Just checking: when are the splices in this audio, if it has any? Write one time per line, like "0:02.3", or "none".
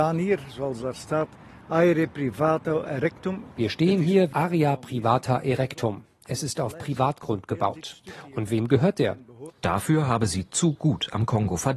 0:04.3
0:09.5